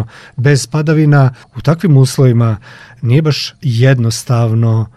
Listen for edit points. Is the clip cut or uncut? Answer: cut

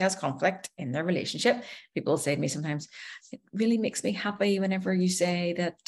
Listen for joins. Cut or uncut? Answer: uncut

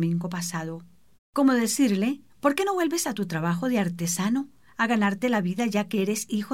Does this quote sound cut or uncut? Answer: cut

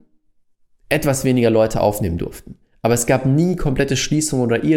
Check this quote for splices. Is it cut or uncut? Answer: uncut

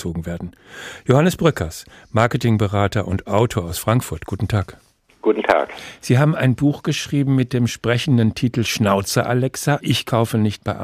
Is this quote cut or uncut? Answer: uncut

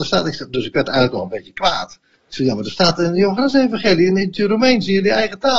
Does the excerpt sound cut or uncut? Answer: uncut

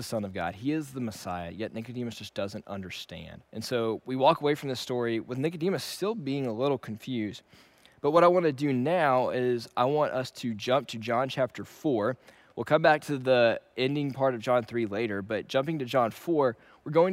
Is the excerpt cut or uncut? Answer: cut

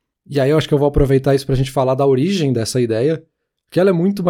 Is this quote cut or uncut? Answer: uncut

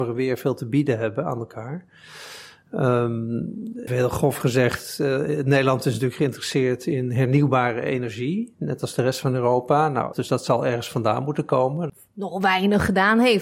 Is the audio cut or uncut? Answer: cut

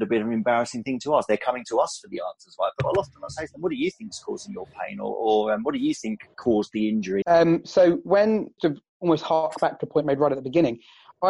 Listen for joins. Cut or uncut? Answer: cut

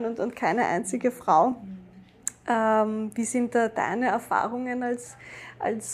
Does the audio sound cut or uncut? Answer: uncut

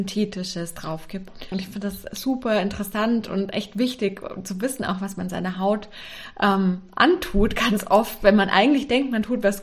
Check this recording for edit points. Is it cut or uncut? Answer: cut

